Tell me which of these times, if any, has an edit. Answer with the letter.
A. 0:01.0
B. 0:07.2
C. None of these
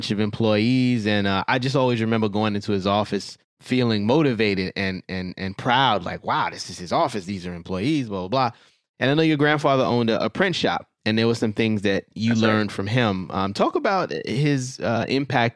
C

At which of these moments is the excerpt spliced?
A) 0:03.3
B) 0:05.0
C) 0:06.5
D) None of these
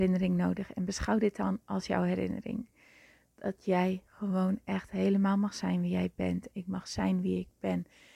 C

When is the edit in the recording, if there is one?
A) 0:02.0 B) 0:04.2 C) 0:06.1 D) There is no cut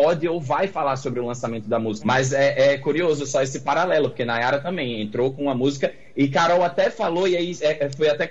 A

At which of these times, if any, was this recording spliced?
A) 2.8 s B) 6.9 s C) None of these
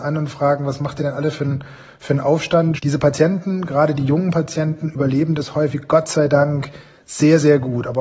A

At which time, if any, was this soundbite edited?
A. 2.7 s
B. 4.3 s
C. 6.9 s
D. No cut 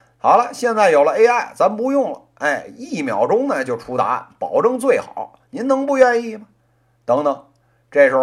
D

